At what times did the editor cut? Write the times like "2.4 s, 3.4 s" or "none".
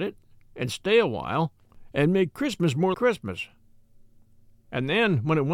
2.9 s